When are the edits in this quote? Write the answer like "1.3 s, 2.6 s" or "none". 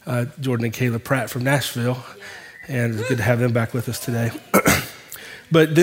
none